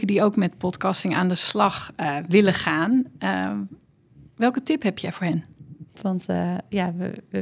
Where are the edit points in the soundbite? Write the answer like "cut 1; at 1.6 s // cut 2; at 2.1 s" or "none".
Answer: cut 1; at 5.9 s